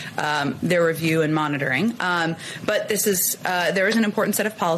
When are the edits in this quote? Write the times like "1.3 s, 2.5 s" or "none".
none